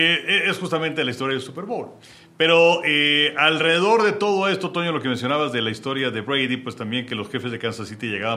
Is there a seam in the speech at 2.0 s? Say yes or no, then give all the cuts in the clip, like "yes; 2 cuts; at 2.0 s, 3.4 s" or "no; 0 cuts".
no; 0 cuts